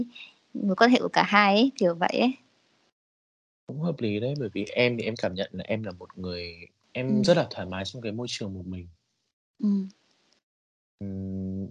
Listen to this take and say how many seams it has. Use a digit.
0